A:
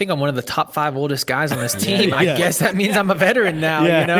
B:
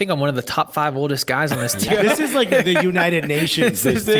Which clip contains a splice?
B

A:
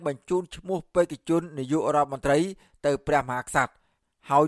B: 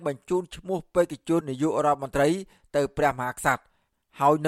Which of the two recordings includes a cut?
B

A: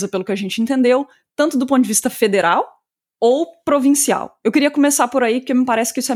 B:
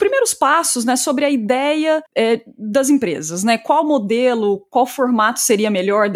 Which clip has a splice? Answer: B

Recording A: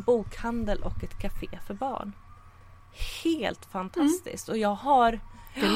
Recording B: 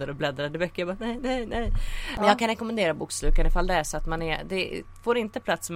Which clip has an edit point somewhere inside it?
B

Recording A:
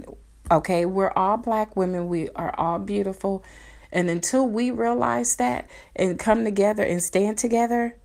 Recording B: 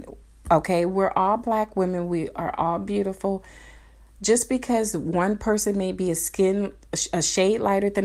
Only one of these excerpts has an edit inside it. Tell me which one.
A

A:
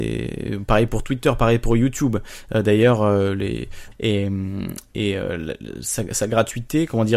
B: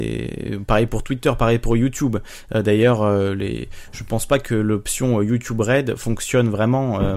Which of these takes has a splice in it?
A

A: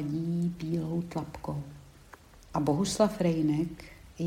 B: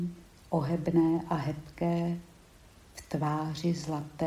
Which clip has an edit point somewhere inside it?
A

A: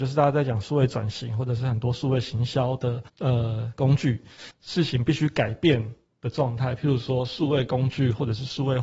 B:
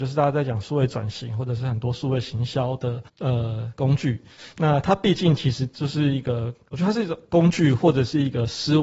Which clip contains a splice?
A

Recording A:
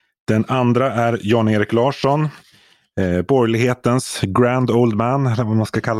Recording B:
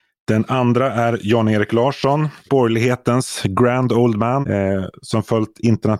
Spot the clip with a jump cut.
B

